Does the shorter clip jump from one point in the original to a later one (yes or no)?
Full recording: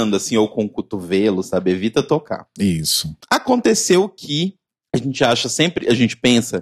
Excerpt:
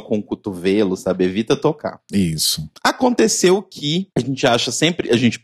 yes